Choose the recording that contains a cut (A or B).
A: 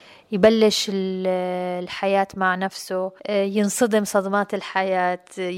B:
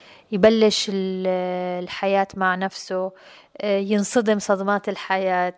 A